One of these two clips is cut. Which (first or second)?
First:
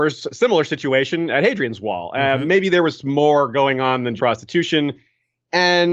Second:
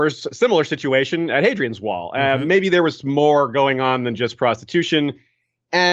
first